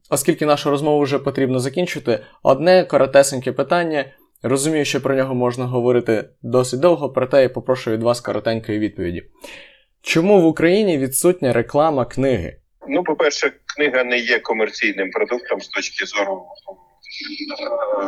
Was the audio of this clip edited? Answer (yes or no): yes